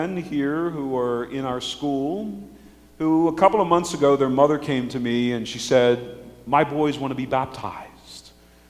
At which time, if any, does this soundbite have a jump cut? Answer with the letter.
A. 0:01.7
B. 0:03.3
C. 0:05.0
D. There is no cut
D